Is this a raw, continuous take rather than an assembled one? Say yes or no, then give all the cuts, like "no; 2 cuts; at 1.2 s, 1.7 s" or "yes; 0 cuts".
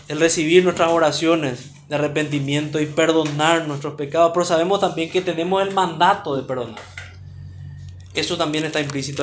yes; 0 cuts